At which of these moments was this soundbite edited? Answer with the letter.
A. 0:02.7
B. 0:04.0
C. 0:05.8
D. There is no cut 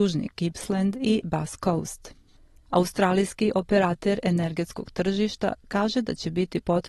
A